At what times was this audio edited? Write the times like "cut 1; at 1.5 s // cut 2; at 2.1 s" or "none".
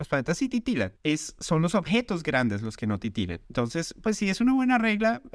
cut 1; at 1.0 s // cut 2; at 3.4 s